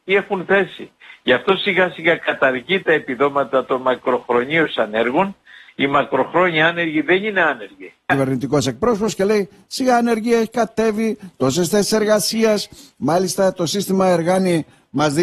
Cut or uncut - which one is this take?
cut